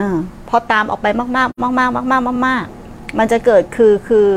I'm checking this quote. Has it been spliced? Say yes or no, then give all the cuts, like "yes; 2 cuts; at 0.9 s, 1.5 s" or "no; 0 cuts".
no; 0 cuts